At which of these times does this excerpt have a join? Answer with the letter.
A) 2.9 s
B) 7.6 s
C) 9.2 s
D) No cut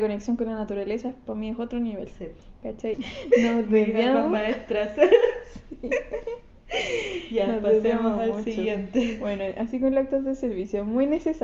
A